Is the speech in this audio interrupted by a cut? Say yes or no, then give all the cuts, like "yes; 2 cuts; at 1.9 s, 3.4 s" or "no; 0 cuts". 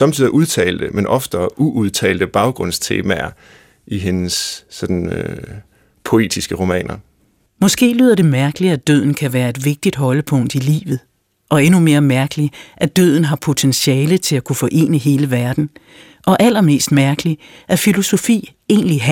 no; 0 cuts